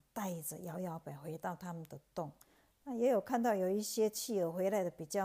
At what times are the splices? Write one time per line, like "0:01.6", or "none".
0:01.0